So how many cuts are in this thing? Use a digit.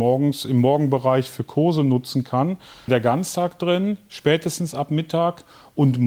1